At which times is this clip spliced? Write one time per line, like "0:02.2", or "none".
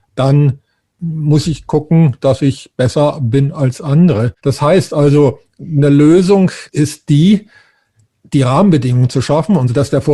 0:04.4
0:06.7

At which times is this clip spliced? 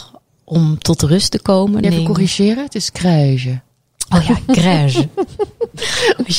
0:01.8

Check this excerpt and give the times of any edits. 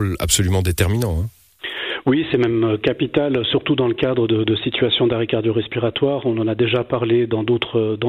none

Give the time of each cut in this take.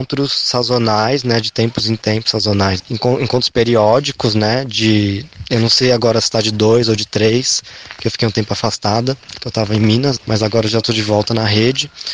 0:02.8
0:10.2

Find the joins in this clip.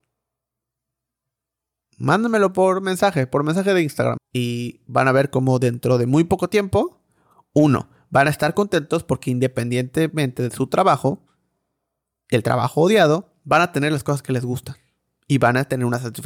0:04.2

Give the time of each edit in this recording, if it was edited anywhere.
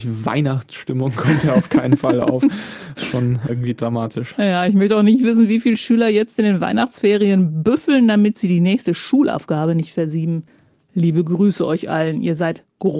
0:03.5

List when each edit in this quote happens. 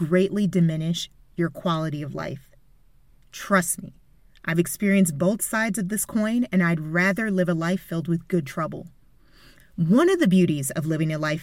0:09.6

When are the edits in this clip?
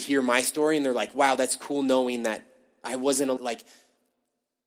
0:03.4

